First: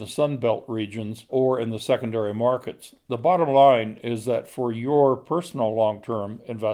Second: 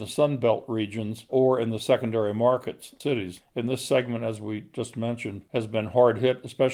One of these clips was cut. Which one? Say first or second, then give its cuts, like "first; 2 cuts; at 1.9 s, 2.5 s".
second; 1 cut; at 3.0 s